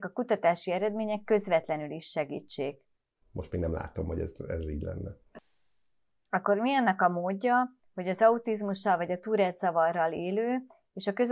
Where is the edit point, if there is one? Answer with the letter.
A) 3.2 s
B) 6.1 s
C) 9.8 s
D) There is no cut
A